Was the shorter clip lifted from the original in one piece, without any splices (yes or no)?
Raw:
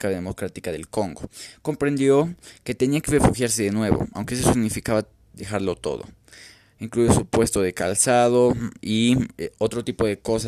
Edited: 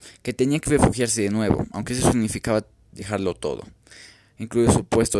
yes